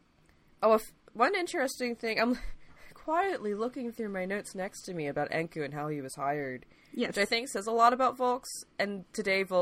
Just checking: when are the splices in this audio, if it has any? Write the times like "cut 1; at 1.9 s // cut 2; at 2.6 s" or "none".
none